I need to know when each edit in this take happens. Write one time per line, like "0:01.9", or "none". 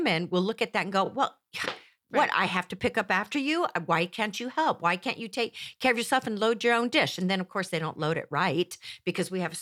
none